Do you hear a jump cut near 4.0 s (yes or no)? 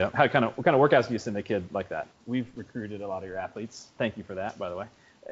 yes